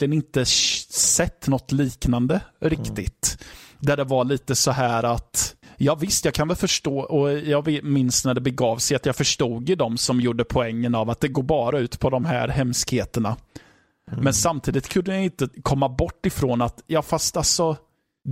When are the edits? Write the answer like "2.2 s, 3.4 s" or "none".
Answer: none